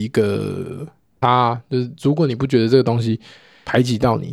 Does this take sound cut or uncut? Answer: cut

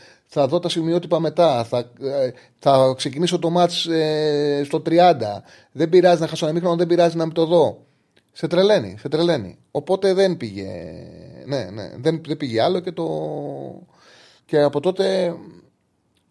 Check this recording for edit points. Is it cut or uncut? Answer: cut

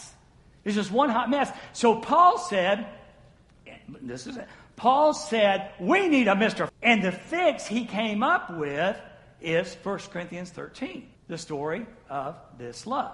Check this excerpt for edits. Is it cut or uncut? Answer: cut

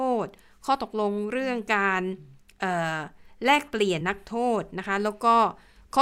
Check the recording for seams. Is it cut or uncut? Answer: cut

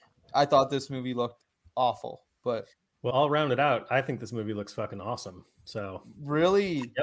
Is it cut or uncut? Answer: cut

